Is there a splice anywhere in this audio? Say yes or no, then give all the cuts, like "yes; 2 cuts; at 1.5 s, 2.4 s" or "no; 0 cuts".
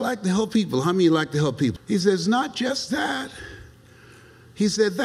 yes; 1 cut; at 1.8 s